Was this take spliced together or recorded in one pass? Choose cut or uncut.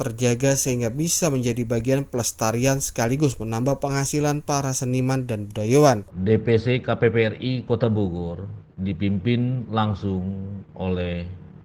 cut